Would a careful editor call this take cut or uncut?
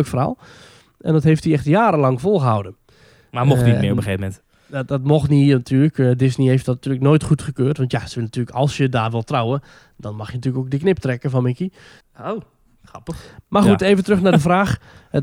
cut